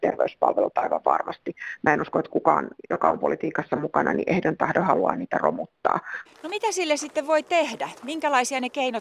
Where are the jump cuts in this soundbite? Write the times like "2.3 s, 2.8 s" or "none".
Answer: 6.3 s